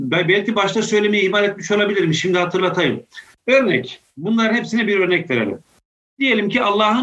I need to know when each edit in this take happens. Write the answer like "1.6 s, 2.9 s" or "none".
3.4 s